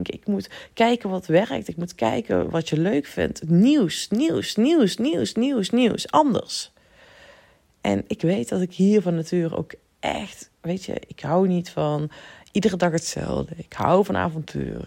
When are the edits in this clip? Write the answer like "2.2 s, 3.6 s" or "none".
none